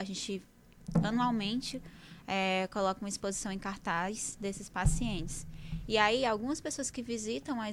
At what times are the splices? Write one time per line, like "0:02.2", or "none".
none